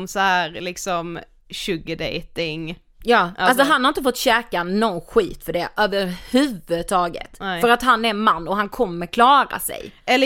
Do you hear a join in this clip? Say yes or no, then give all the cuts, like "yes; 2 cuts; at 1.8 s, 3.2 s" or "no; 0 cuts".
no; 0 cuts